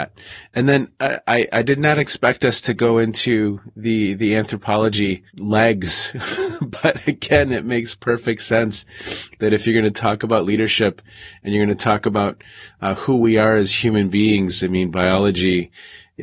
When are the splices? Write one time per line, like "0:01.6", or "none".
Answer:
0:05.3